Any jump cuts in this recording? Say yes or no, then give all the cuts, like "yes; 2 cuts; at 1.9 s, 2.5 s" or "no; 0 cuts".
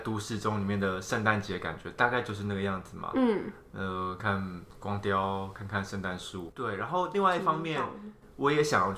yes; 2 cuts; at 4.2 s, 6.5 s